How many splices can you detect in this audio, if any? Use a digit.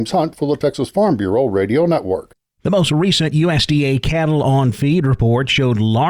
0